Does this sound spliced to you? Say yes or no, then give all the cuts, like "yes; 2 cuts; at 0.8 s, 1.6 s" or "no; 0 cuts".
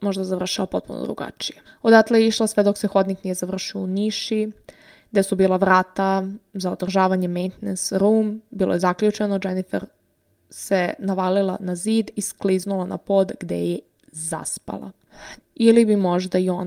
yes; 2 cuts; at 1.6 s, 15.4 s